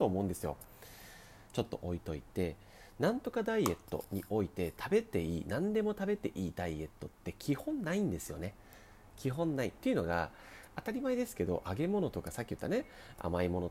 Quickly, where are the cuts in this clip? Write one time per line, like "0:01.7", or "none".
0:01.5

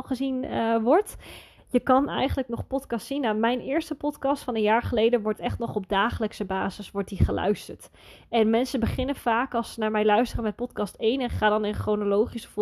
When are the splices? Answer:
0:01.6

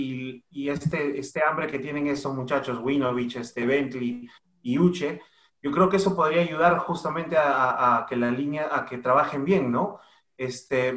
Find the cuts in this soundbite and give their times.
none

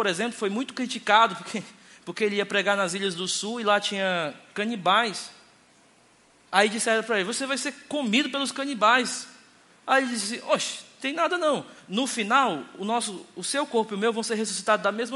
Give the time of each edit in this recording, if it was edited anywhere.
none

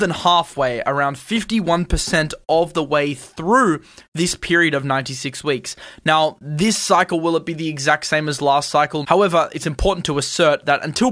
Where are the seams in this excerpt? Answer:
0:09.0

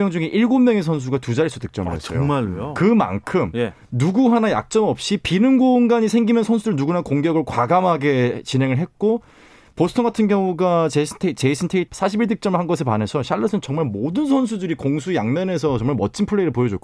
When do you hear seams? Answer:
0:11.9

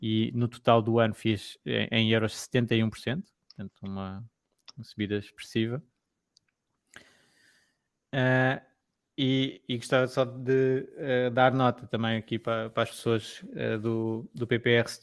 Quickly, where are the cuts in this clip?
none

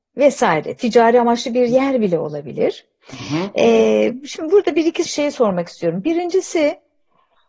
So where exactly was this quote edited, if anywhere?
0:05.1

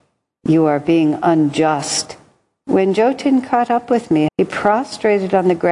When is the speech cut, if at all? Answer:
0:02.6
0:04.3

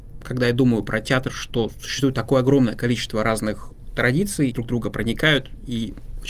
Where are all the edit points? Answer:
0:04.5

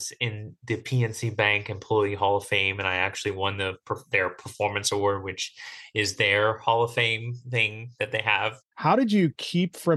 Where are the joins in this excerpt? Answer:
0:08.7

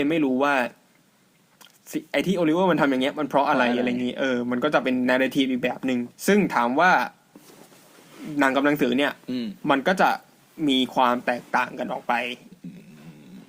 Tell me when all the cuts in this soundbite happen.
0:06.1
0:09.6

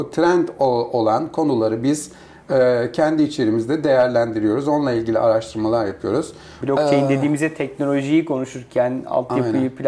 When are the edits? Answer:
0:06.6

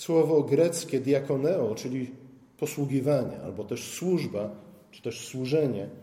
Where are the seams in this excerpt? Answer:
none

